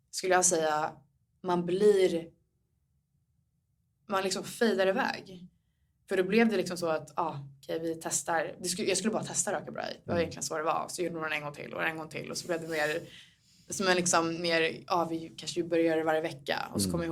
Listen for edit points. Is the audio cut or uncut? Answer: uncut